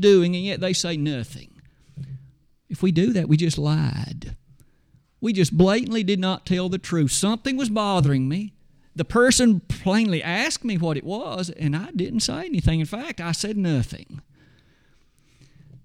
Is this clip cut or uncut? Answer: uncut